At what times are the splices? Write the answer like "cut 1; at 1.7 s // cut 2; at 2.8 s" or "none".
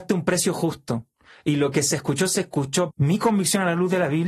cut 1; at 2.9 s